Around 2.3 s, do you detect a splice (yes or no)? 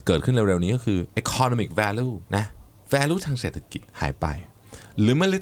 yes